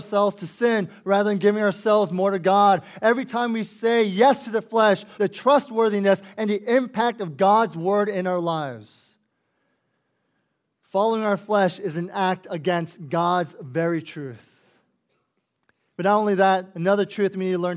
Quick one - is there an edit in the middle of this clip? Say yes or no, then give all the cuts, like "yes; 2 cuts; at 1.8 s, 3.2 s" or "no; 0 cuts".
yes; 1 cut; at 5.2 s